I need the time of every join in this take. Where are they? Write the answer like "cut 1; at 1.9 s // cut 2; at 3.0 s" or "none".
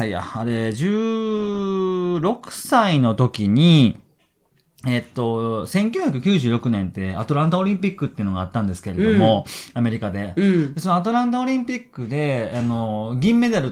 none